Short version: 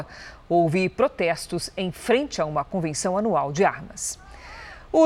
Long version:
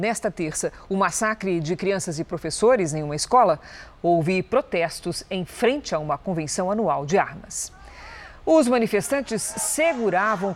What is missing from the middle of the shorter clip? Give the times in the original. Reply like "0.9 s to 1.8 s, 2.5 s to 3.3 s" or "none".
none

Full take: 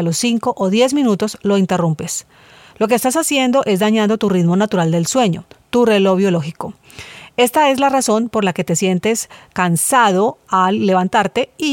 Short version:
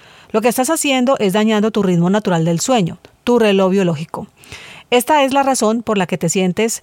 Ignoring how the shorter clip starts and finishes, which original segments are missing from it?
none

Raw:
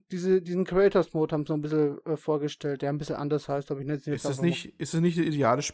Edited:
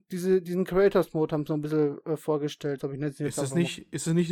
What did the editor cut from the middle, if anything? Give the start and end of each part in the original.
2.8 s to 3.6 s

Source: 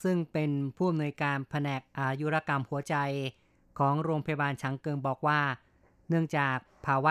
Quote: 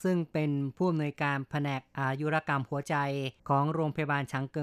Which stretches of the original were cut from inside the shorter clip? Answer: 3.4 s to 3.7 s

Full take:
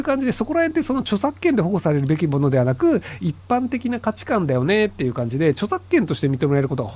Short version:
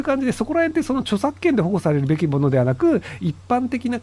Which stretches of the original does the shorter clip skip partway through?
none

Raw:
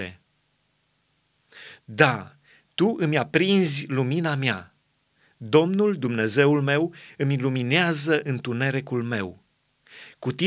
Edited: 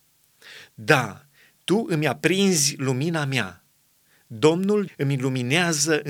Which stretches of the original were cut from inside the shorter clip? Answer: 6.0 s to 7.1 s

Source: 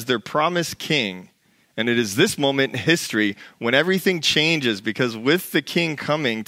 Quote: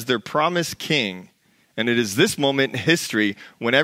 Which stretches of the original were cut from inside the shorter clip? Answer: none

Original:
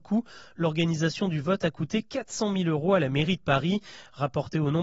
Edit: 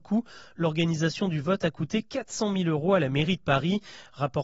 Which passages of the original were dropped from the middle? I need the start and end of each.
none

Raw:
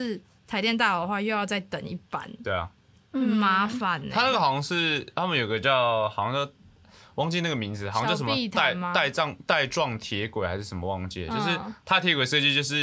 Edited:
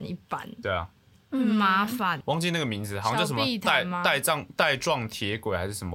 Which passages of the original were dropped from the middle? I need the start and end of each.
4.0 s to 7.1 s

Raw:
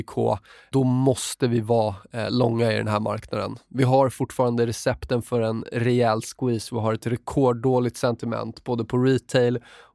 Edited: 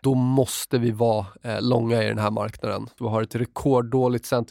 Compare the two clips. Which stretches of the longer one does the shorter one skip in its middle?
3.7 s to 6.7 s

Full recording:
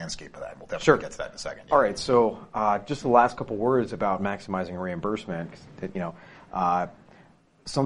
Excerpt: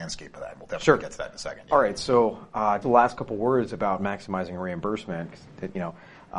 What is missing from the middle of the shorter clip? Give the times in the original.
2.8 s to 3.0 s

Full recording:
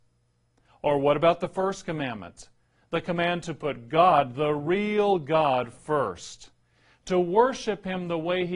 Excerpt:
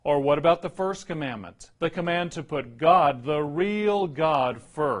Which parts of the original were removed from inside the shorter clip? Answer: 2.5 s to 2.9 s

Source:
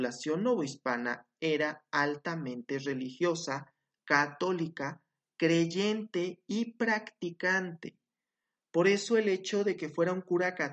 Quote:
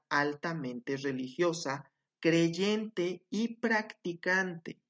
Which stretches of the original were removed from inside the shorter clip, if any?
3.9 s to 5.2 s

